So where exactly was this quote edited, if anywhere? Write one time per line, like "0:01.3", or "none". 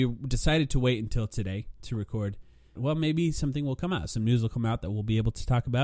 0:02.8